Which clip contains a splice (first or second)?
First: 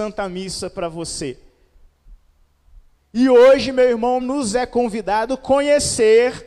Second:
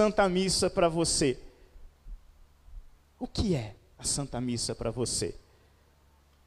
first